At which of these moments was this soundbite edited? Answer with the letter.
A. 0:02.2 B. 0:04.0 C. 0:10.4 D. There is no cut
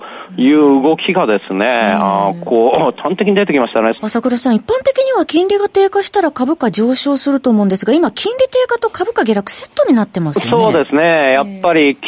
B